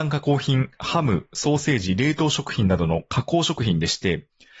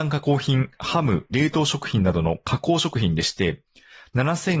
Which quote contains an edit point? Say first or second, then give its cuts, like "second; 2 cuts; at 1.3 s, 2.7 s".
second; 1 cut; at 1.3 s